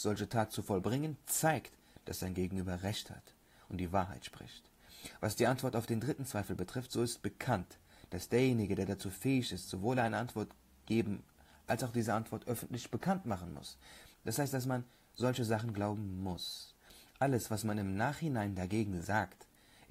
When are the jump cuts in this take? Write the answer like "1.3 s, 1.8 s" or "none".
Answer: 14.1 s